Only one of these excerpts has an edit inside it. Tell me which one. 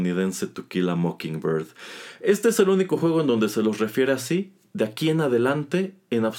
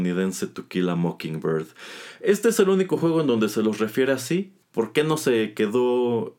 second; 1 cut; at 4.6 s

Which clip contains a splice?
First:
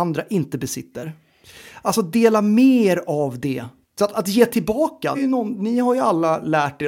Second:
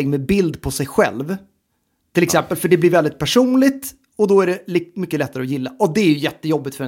first; 2 cuts; at 3.8 s, 5.1 s

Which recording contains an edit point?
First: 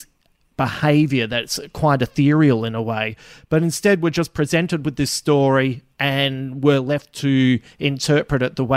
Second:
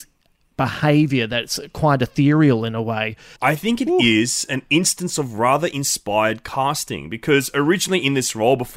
second; 1 cut; at 3.4 s

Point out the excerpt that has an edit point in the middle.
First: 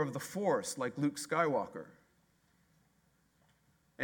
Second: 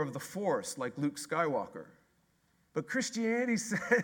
second; 1 cut; at 2.7 s

